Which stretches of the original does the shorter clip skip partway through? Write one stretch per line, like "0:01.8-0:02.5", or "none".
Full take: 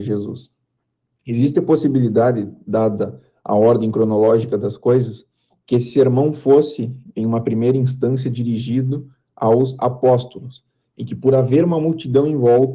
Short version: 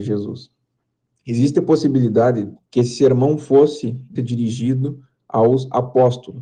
0:02.6-0:05.5
0:07.1-0:08.2